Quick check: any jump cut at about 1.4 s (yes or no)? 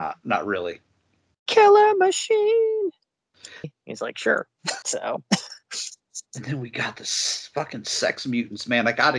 no